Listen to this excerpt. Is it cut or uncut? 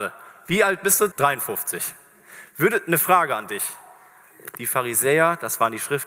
cut